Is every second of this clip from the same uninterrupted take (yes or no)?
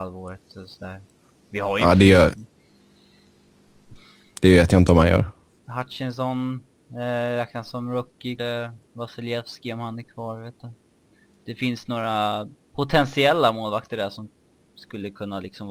no